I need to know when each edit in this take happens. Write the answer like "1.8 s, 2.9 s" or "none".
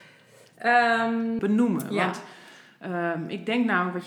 1.4 s